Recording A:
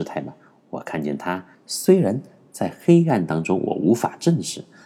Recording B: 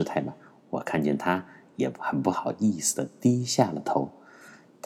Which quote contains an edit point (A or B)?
A